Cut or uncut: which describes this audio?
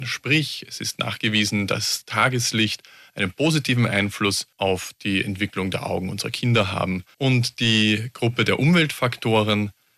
cut